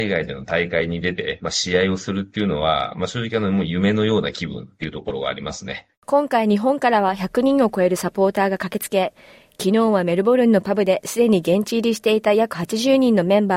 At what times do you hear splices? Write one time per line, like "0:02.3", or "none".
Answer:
none